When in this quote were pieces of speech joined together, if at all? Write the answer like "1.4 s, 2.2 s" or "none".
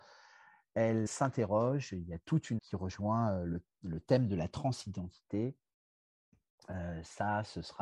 1.1 s, 2.6 s